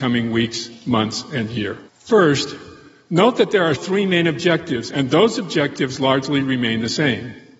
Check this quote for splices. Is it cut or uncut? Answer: cut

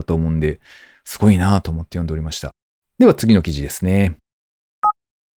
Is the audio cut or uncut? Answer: cut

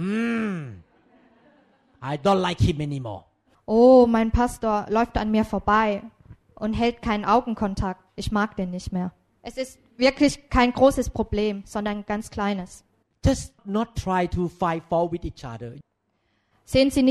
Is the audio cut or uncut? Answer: cut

